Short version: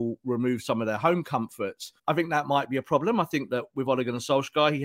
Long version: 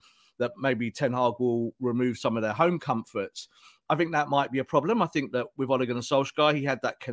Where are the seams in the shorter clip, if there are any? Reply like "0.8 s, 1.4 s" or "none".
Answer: 2.0 s

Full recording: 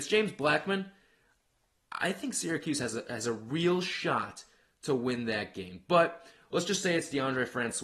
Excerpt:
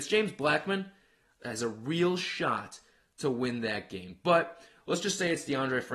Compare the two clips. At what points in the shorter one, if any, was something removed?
1.4 s

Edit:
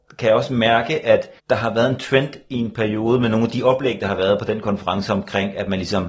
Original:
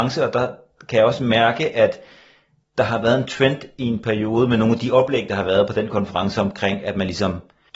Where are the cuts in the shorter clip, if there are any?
1.4 s

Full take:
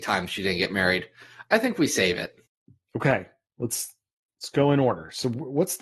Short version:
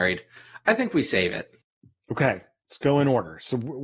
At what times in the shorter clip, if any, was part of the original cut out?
2.6 s

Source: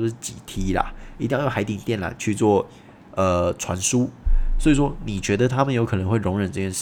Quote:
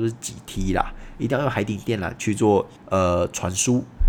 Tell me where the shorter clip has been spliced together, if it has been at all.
2.8 s

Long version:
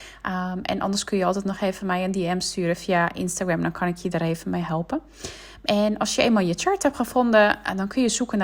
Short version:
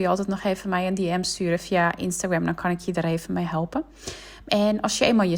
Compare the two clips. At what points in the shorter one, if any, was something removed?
none

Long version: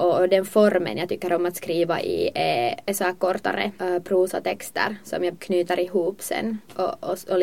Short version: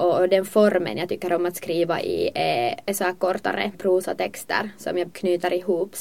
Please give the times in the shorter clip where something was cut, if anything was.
3.7 s

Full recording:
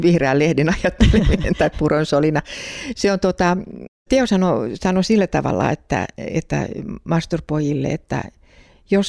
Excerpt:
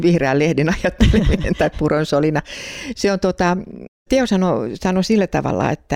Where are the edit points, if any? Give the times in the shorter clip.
none

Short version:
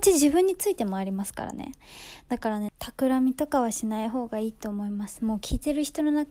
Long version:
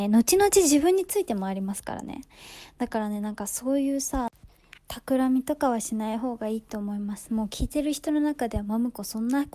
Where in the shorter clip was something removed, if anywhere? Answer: 2.7 s

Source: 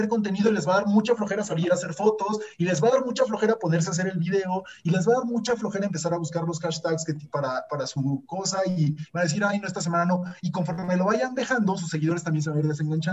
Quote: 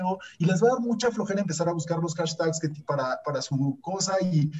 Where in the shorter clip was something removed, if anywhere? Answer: none

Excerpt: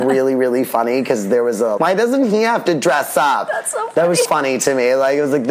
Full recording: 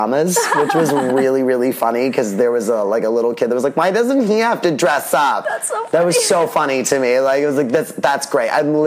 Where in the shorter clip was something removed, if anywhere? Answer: 1.8 s, 4.2 s

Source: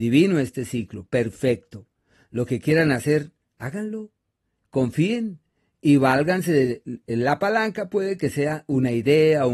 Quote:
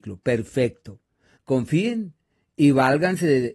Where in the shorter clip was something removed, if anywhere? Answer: 1.4 s

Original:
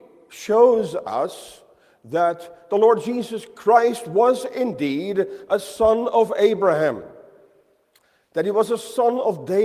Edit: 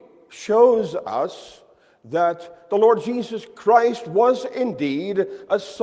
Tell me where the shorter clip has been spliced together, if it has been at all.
none

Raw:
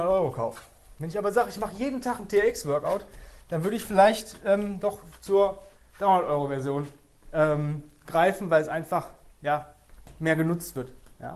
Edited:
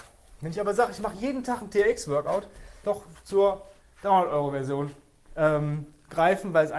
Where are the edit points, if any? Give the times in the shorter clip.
2.8 s

